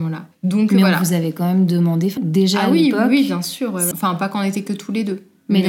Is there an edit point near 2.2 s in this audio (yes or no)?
yes